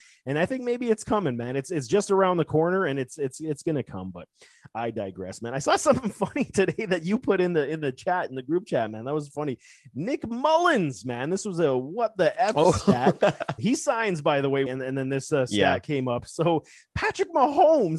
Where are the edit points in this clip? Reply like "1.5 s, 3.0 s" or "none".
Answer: 13.6 s, 14.7 s

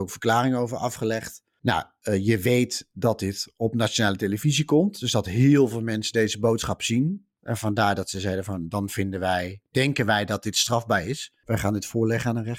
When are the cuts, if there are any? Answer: none

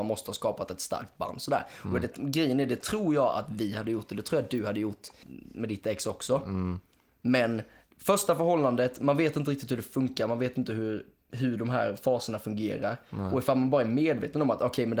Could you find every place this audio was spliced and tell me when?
none

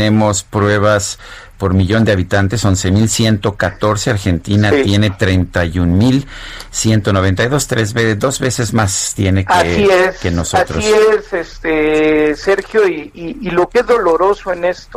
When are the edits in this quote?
13.9 s

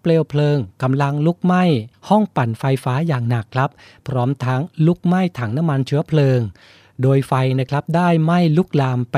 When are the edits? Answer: none

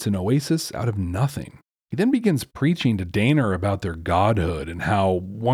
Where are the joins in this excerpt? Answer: none

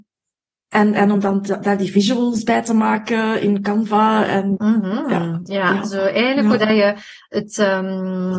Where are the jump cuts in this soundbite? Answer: 4.6 s

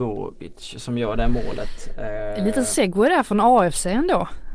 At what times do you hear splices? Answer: none

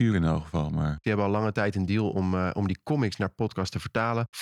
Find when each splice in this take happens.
1.0 s

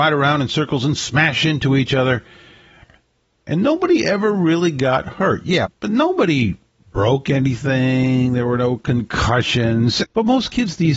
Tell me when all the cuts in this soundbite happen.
5.6 s, 10.0 s

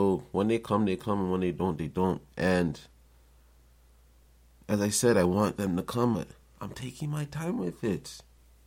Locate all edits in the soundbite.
2.3 s, 6.1 s

